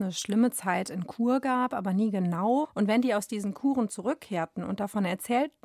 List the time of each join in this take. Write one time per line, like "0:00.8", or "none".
0:02.6